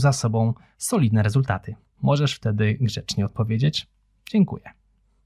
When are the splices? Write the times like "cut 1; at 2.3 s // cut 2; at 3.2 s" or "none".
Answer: cut 1; at 1.9 s